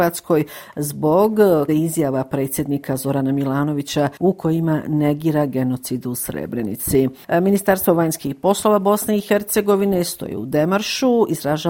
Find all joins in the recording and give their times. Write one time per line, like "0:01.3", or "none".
0:01.7